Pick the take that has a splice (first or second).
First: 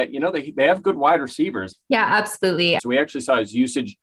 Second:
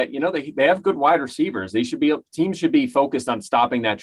first